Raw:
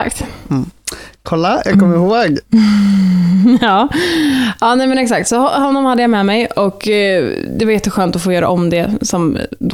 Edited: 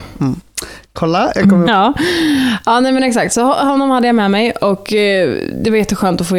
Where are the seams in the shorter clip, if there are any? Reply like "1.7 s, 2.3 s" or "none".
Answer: 1.6 s